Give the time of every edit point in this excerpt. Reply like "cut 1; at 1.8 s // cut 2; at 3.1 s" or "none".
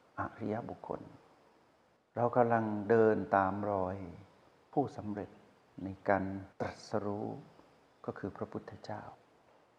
cut 1; at 6.5 s